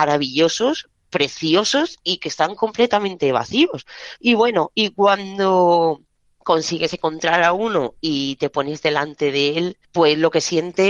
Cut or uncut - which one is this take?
cut